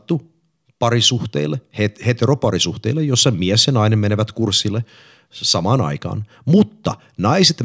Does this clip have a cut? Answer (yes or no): no